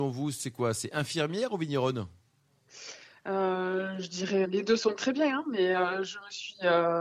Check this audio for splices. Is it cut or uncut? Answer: cut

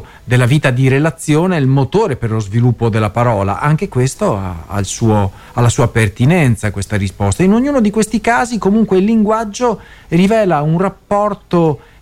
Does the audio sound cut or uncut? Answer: uncut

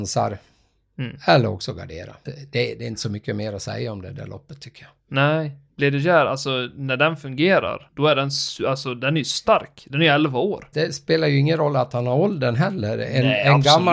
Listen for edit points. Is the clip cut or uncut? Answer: cut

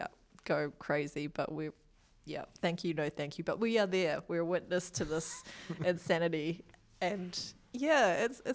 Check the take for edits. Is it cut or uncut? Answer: uncut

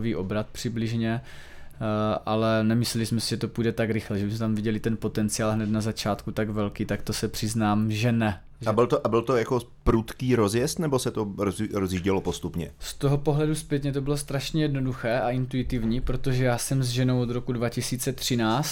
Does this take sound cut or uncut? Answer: cut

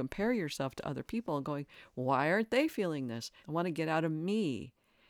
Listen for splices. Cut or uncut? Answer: cut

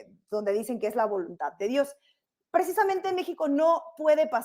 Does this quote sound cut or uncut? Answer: uncut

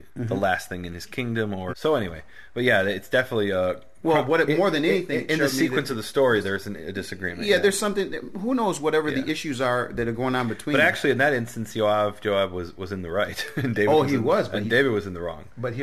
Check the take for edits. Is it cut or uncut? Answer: cut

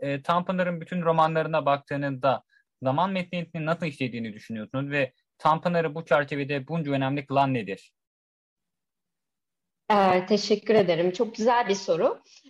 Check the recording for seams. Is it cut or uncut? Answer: uncut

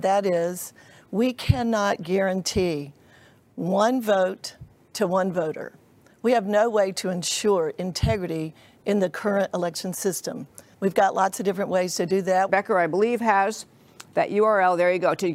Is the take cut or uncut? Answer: cut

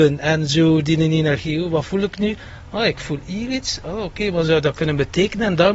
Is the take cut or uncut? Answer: uncut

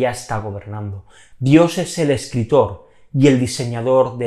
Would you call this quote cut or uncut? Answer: cut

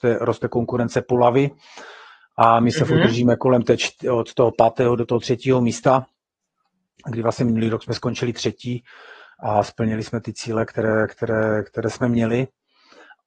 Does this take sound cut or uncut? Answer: uncut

